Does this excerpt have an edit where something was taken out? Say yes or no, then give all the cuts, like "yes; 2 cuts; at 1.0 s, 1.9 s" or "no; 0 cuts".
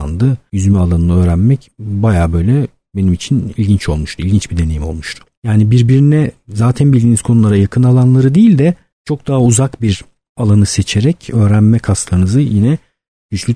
no; 0 cuts